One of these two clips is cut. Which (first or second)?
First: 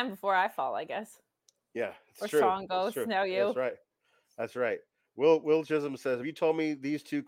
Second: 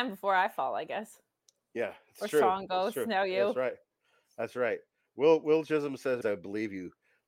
second